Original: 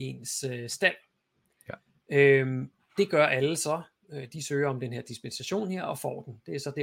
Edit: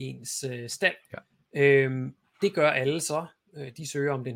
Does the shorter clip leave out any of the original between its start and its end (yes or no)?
yes